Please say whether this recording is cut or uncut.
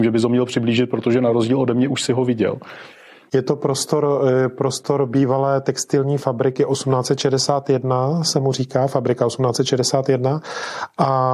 uncut